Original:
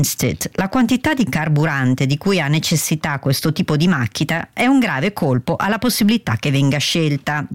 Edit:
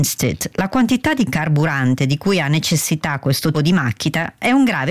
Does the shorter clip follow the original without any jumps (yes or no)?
no